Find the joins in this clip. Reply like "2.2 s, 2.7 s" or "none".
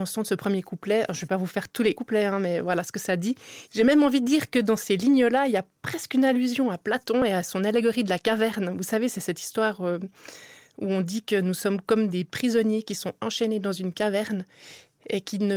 3.7 s